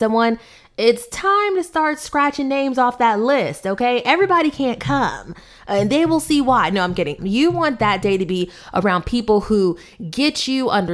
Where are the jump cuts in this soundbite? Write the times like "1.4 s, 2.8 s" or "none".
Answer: 7.2 s